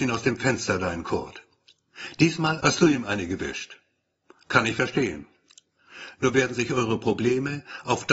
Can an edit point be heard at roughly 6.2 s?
no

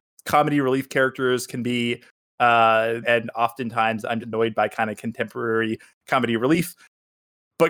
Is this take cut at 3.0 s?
yes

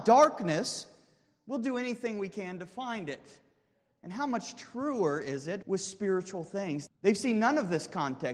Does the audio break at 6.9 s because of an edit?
yes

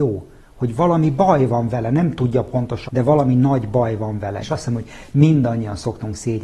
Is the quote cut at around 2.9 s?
yes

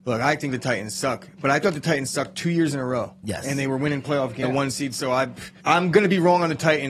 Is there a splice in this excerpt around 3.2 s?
no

